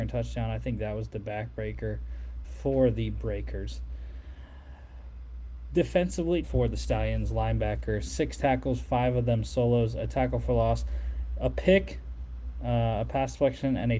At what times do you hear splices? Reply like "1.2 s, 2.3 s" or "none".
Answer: 2.4 s, 6.4 s

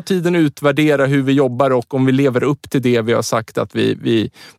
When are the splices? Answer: none

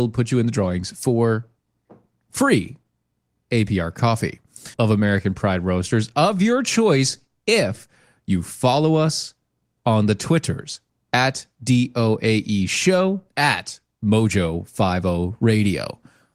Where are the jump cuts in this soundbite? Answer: 4.7 s, 13.3 s

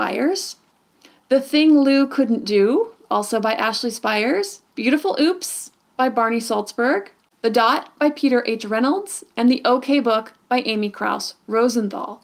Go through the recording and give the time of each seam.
4.7 s

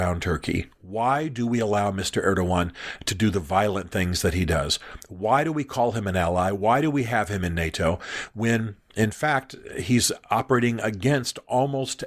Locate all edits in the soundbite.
none

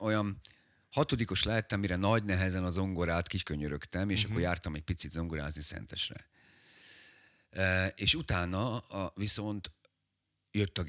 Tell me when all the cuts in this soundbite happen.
none

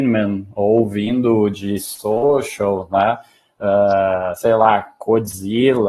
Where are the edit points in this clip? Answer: none

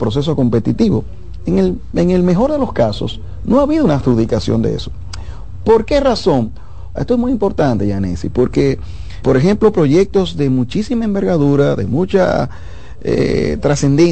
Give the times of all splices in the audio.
7.0 s, 9.2 s

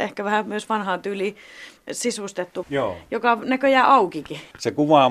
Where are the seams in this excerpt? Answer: 2.6 s

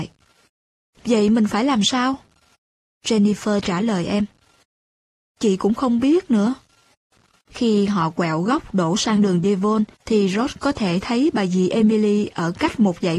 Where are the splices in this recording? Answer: 7.4 s, 9.9 s

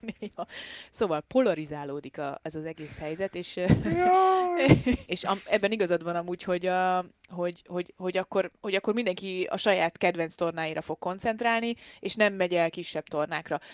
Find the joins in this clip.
5.0 s, 8.6 s

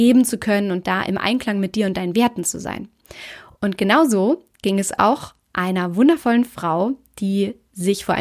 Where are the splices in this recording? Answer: none

